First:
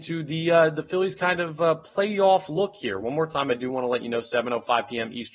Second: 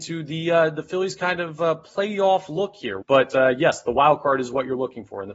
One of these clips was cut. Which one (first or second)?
second